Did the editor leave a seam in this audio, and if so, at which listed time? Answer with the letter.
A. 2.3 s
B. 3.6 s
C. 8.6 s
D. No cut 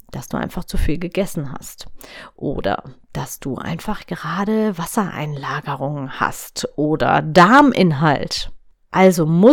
D